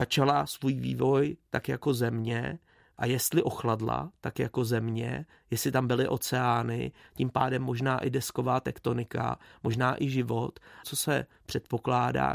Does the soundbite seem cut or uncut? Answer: cut